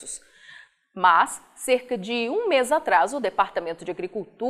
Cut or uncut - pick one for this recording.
uncut